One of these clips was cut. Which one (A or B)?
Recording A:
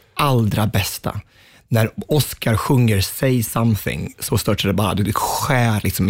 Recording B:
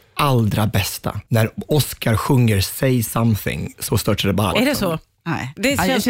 B